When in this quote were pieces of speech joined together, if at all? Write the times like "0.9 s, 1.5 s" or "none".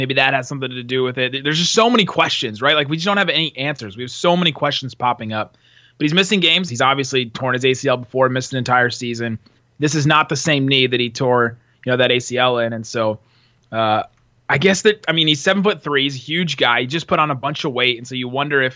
6.7 s